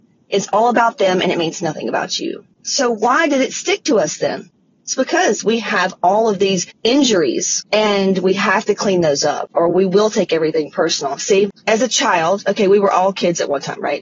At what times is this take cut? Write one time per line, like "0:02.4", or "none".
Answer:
none